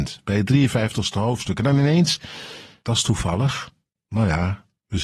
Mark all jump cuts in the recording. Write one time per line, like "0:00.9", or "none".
0:02.8